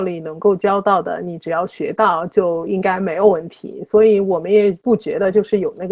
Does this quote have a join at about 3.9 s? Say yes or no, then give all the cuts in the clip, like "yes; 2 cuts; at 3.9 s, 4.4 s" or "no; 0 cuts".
no; 0 cuts